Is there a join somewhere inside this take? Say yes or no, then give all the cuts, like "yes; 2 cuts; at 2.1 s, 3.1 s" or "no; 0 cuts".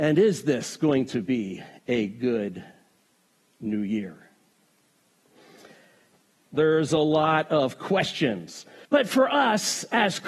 yes; 2 cuts; at 6.5 s, 8.9 s